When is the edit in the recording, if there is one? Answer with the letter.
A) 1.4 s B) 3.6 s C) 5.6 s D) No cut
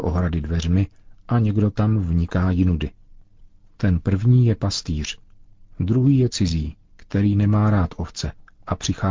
D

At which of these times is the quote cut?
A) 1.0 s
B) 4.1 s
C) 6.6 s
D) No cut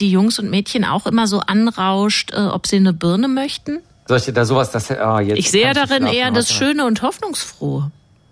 B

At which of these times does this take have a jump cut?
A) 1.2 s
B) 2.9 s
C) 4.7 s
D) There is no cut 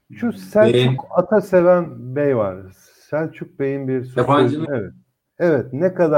C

